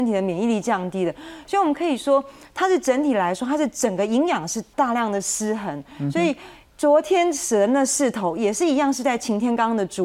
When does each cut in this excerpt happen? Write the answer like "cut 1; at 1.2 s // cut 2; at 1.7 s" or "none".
cut 1; at 4.7 s